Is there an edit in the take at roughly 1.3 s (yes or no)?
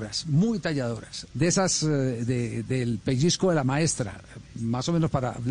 yes